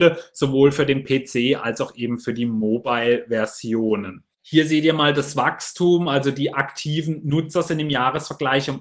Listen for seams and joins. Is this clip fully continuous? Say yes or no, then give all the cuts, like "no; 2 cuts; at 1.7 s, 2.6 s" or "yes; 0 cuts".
no; 1 cut; at 4.3 s